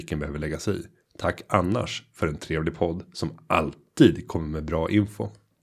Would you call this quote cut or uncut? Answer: uncut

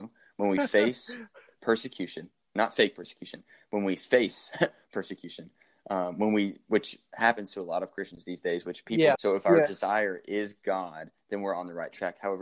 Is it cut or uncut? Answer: cut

